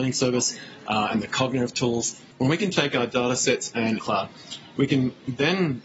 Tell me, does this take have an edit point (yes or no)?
yes